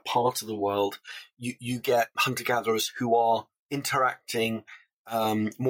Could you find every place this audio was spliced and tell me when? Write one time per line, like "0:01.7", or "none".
0:02.1
0:03.6